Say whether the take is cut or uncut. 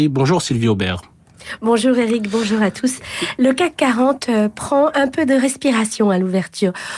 uncut